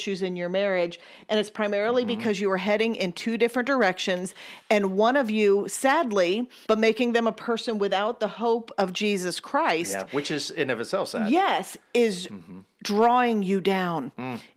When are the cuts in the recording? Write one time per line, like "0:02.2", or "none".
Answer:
0:06.6

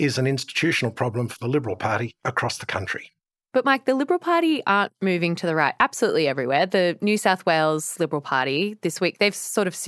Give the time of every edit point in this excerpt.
none

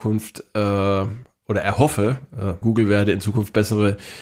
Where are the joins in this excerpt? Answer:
0:02.6

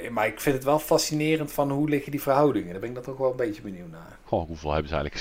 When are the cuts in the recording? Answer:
0:04.3

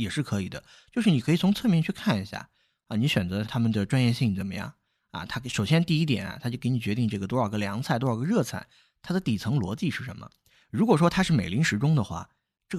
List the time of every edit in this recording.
0:03.4

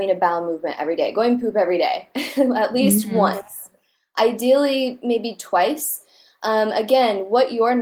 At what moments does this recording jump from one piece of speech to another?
none

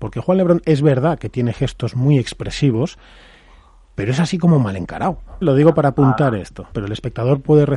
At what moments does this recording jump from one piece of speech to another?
0:05.4
0:06.7

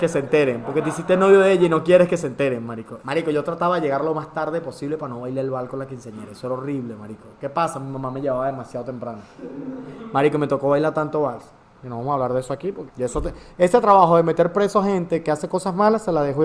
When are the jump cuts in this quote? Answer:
0:03.0
0:11.7
0:12.9

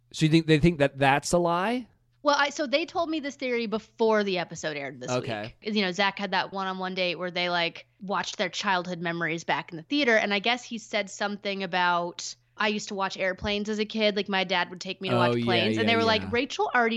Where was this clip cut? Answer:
none

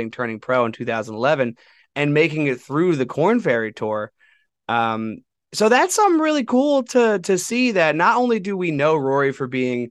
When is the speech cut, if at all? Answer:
none

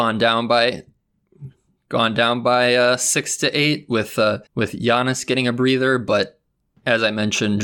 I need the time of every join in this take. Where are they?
0:04.5

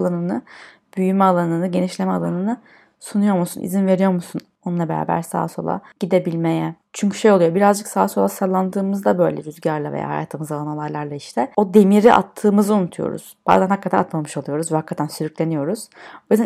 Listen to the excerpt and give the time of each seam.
none

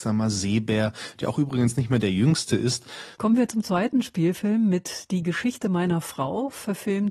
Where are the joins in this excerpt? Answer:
0:03.1

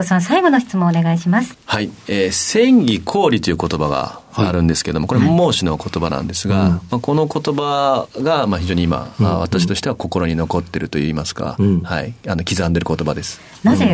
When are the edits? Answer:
0:01.5

